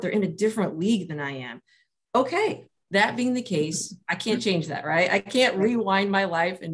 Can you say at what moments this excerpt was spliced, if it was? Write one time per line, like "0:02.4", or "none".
none